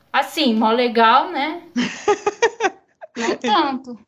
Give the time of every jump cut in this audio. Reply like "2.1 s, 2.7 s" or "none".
none